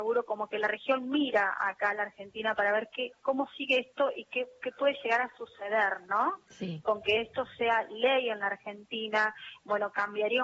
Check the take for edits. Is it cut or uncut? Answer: uncut